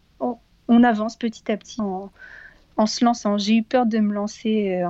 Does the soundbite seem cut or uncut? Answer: cut